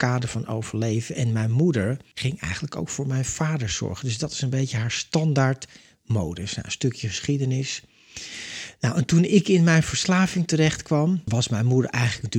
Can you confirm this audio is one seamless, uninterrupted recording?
yes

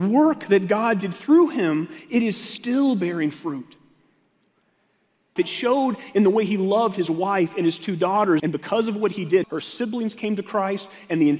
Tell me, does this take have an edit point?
yes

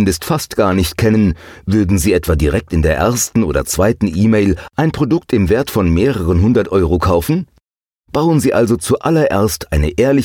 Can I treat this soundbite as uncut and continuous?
yes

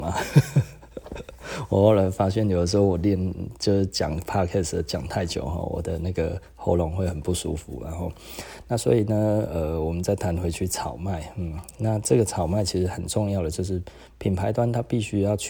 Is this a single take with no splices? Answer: yes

